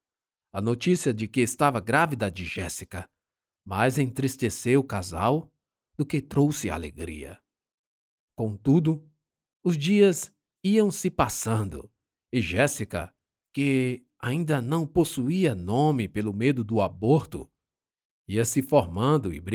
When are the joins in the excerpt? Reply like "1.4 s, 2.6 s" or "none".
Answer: none